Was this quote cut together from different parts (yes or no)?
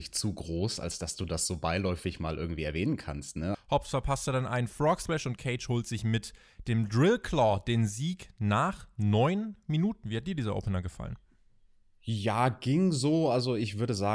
yes